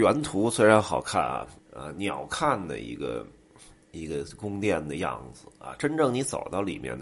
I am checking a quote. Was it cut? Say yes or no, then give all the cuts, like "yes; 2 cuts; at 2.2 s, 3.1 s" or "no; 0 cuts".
yes; 1 cut; at 1.6 s